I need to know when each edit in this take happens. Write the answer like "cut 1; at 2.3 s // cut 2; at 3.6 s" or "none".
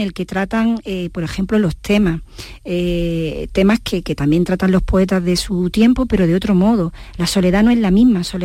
none